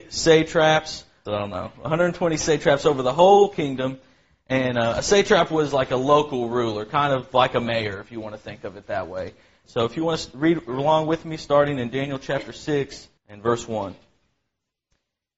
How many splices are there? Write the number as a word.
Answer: three